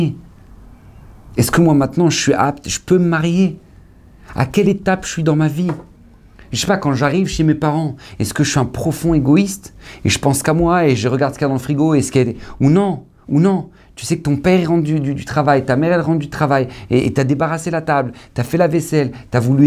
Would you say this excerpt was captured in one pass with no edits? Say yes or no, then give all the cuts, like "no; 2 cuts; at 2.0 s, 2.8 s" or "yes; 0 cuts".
yes; 0 cuts